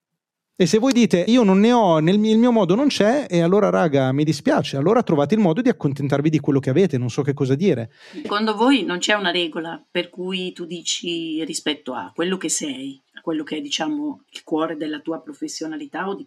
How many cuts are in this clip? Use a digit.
2